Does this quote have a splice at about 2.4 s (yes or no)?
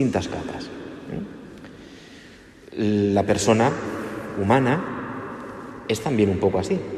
no